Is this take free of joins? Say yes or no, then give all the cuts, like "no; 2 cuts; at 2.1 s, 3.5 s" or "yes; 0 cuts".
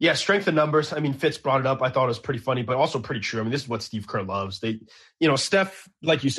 yes; 0 cuts